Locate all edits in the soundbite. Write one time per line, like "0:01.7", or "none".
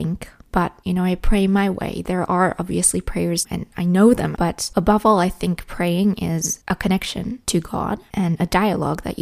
none